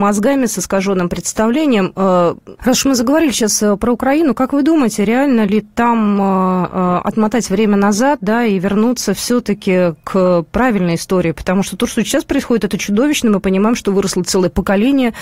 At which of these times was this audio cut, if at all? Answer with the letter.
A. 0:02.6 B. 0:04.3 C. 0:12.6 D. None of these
A